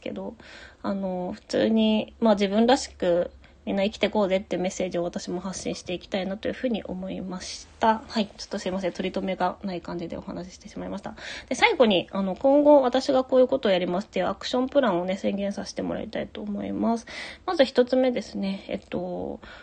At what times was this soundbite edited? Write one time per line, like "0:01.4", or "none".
none